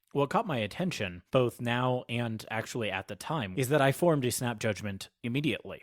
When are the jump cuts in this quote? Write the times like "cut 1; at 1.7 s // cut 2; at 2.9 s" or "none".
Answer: cut 1; at 1.3 s // cut 2; at 3.5 s